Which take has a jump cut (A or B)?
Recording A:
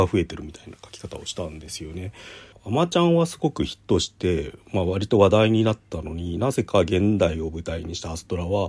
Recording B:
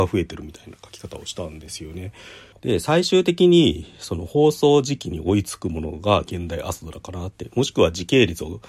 B